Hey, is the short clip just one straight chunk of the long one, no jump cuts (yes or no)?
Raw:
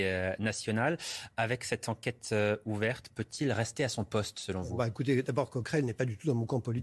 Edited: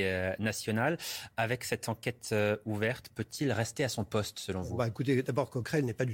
yes